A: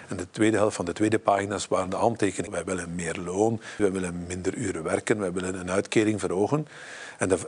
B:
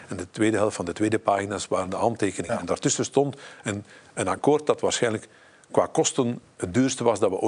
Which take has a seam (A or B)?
A